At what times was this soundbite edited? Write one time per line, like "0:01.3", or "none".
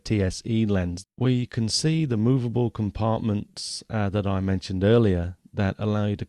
0:01.0